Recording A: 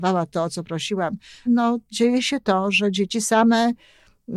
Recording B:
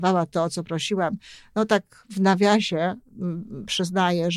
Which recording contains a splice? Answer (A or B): A